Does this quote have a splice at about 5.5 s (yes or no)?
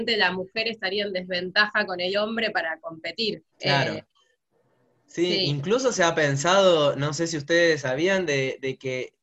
no